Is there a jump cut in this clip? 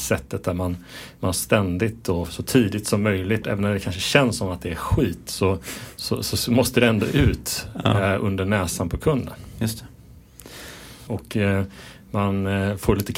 yes; 2 cuts; at 3.4 s, 11.1 s

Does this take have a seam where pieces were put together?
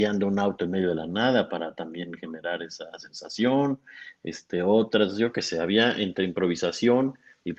no; 0 cuts

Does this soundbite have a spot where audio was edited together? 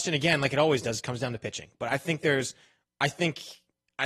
no; 0 cuts

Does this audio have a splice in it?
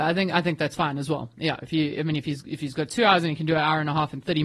no; 0 cuts

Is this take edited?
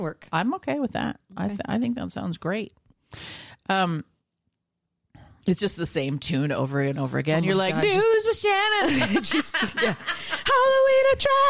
no; 0 cuts

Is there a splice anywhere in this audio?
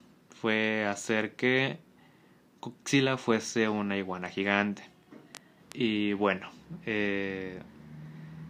yes; 1 cut; at 5.6 s

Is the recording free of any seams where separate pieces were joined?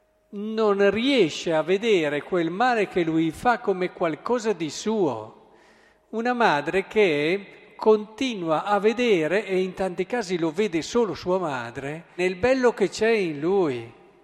no; 1 cut; at 12.2 s

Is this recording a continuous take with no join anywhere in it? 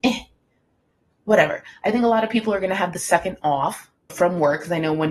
no; 1 cut; at 4.1 s

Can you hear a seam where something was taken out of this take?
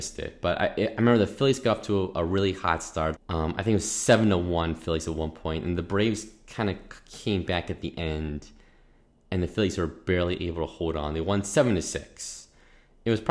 yes; 1 cut; at 3.2 s

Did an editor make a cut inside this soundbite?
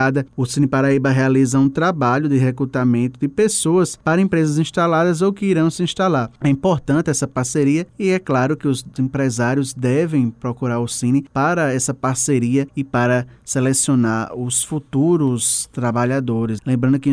no; 0 cuts

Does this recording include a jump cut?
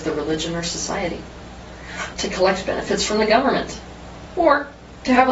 yes; 2 cuts; at 2.1 s, 4.3 s

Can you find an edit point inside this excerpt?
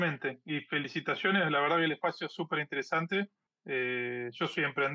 no; 0 cuts

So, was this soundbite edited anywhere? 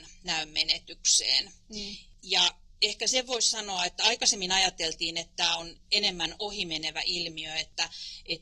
no; 0 cuts

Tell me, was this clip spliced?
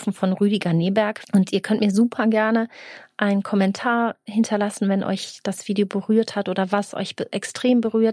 yes; 1 cut; at 1.2 s

